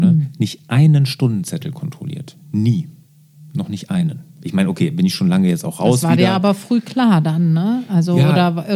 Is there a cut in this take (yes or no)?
no